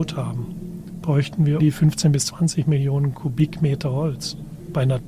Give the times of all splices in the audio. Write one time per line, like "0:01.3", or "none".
0:01.6